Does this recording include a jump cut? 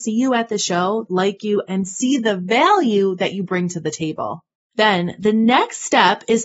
yes; 2 cuts; at 1.1 s, 4.6 s

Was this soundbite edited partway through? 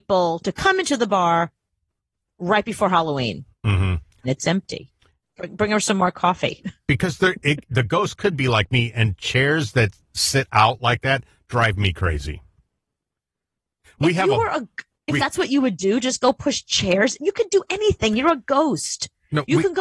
yes; 3 cuts; at 4.2 s, 13.8 s, 15.2 s

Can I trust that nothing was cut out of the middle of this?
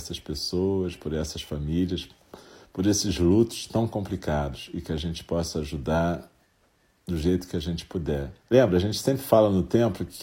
no; 1 cut; at 8.4 s

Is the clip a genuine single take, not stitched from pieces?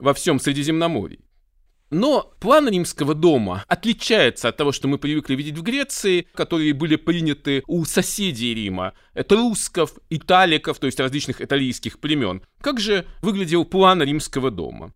no; 2 cuts; at 6.3 s, 12.4 s

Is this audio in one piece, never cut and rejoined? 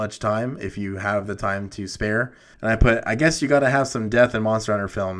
no; 1 cut; at 2.5 s

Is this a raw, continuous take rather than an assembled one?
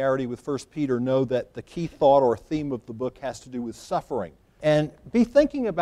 no; 1 cut; at 4.6 s

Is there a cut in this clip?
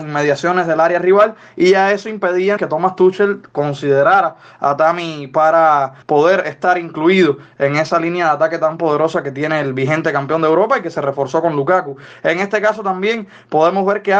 yes; 2 cuts; at 2.6 s, 6.0 s

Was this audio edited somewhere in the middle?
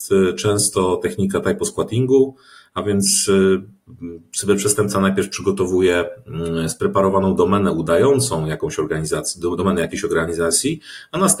no; 0 cuts

